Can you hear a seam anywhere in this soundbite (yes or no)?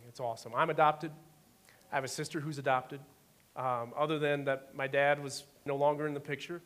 yes